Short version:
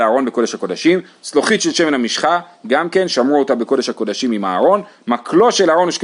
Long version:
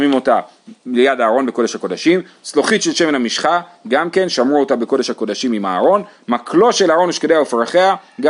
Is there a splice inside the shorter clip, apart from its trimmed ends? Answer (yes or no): no